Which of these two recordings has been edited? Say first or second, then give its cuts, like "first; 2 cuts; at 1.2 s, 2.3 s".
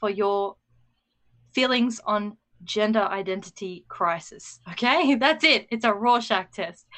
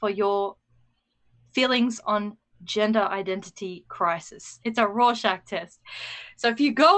second; 1 cut; at 4.6 s